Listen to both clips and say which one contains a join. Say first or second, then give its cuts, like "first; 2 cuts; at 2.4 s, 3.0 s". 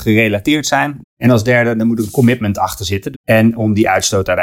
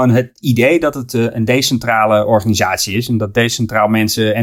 first; 2 cuts; at 1.0 s, 3.1 s